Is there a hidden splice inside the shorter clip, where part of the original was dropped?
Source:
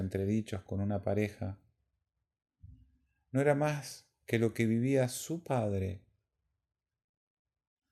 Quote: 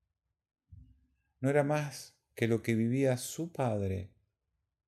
no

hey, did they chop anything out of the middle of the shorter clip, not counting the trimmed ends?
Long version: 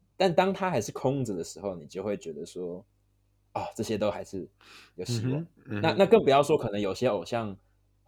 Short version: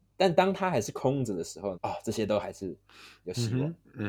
yes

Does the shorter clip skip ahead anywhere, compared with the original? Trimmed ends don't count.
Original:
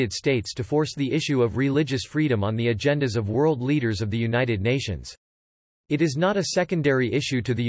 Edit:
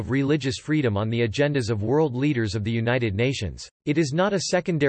yes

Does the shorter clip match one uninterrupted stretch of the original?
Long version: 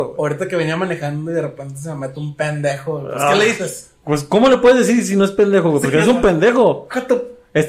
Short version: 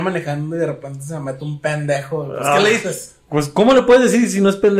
yes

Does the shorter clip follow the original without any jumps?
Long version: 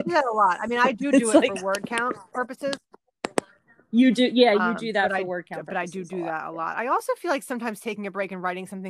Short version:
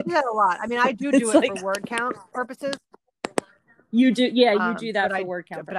yes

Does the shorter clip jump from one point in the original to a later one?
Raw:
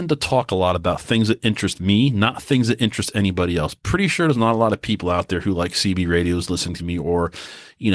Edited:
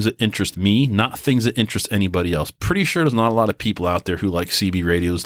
no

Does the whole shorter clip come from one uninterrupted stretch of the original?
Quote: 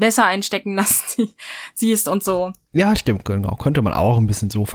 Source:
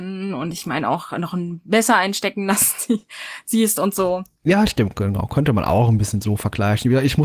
yes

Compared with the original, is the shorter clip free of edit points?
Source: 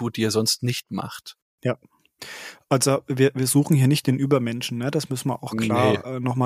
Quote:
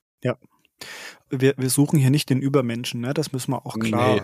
no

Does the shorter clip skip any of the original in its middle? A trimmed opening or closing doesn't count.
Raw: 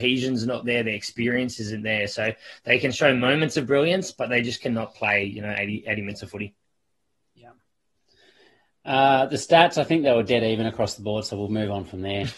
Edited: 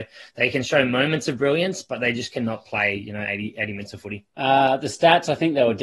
yes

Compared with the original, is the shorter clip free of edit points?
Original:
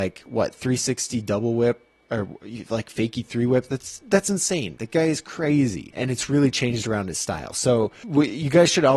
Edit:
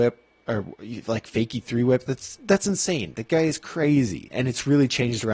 yes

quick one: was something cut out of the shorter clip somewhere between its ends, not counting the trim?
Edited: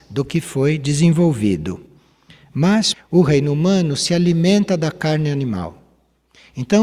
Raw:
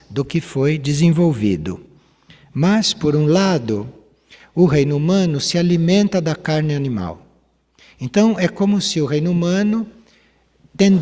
yes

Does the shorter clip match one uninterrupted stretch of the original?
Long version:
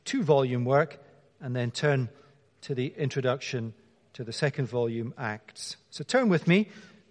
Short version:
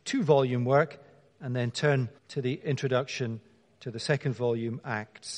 no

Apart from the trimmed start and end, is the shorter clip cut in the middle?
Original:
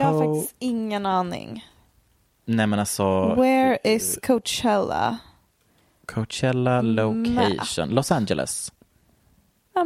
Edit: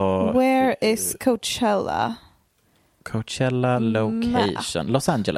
no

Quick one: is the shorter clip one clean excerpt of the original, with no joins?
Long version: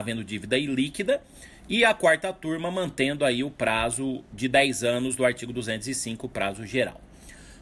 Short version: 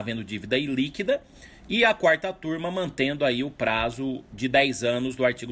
yes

